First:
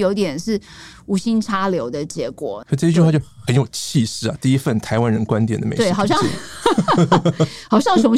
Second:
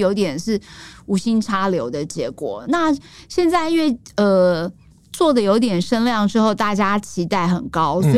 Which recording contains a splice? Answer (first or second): first